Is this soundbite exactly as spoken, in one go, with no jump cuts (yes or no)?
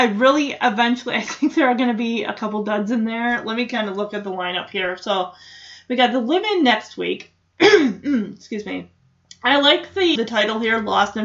no